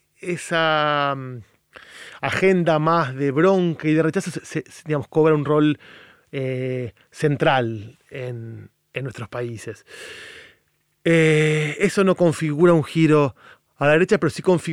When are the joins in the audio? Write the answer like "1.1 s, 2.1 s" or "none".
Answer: none